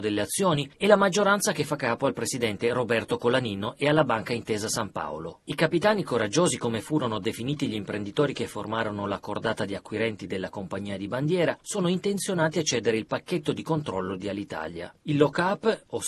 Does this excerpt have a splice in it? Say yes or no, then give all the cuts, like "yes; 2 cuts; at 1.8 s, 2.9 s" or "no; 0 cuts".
no; 0 cuts